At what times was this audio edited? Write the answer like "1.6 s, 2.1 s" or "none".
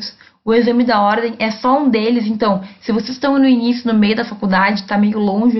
none